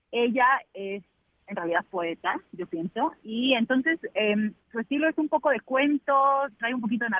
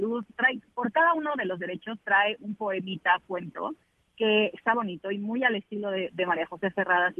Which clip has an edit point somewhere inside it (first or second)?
second